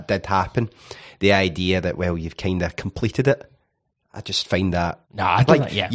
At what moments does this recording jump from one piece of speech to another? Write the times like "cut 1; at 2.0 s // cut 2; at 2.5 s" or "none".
cut 1; at 5.0 s